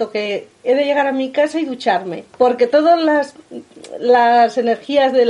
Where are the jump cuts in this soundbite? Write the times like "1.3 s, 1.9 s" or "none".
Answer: 2.3 s

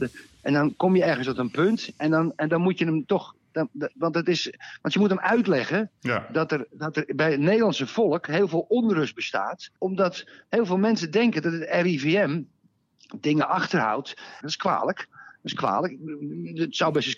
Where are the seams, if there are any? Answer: 9.8 s, 14.4 s

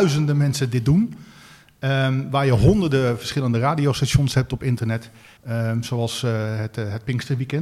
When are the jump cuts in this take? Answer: 5.4 s

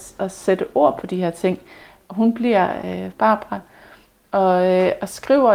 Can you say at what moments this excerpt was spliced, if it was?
3.1 s

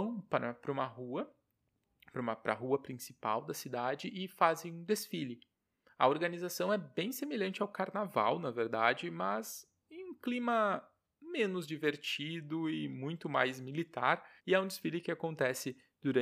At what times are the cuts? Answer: 14.4 s

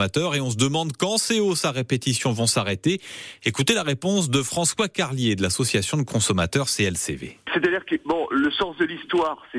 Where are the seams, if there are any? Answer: none

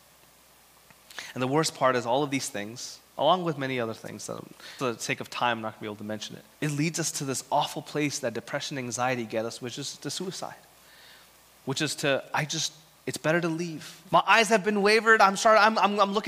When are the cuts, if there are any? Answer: 4.8 s, 6.5 s, 14.1 s

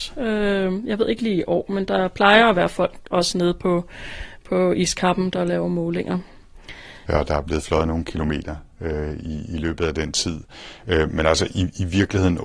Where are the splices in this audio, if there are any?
7.1 s

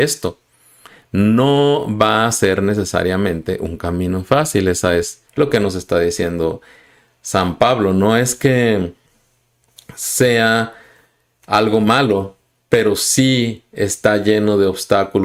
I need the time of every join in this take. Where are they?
5.3 s

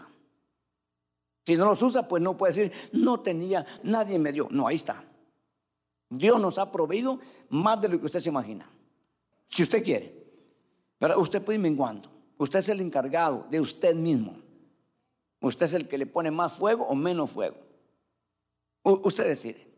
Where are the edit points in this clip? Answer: 3.8 s, 9.3 s

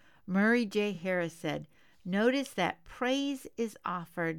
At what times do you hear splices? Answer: none

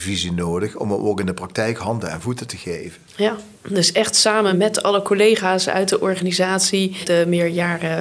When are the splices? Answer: 3.1 s

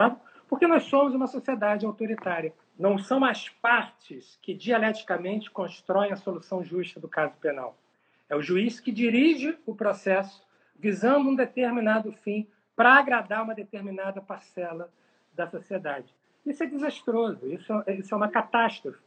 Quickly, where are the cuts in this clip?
2.6 s

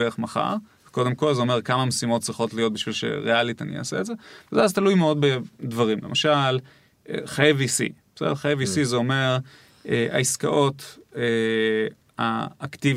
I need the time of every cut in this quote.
none

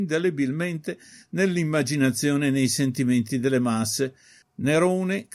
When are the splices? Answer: 4.4 s

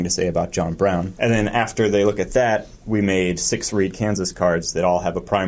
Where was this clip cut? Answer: 1.1 s

